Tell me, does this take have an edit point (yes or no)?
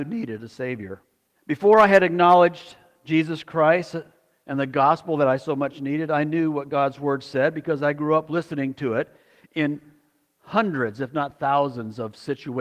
yes